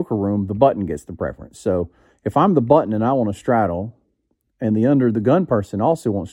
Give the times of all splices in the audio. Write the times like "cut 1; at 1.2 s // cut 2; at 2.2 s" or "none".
none